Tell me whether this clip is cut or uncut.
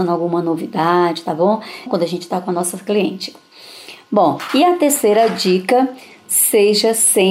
cut